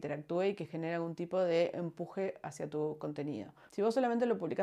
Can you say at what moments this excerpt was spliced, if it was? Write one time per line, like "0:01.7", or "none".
none